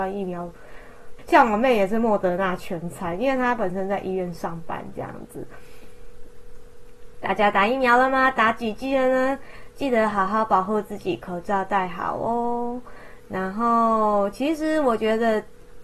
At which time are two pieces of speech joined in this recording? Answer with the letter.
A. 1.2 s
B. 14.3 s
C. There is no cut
A